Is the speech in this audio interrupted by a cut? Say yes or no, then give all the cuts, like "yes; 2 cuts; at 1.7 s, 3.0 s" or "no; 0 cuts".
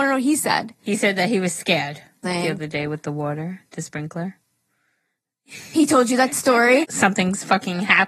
yes; 2 cuts; at 2.2 s, 6.8 s